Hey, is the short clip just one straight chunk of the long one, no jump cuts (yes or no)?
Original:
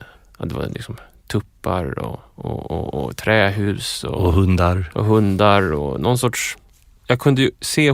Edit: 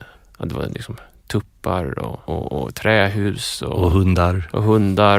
no